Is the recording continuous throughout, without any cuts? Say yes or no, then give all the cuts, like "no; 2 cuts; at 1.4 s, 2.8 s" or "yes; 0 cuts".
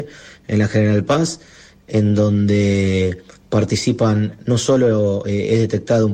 yes; 0 cuts